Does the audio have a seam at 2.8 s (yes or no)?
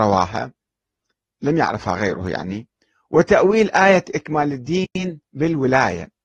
no